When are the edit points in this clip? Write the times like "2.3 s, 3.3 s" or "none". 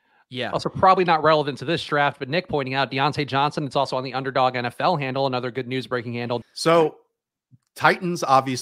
6.4 s